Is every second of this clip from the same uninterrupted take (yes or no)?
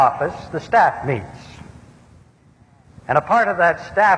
yes